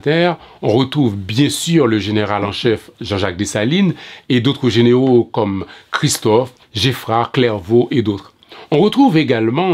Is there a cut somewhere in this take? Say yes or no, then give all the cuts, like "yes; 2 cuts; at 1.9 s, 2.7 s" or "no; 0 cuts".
yes; 1 cut; at 6.6 s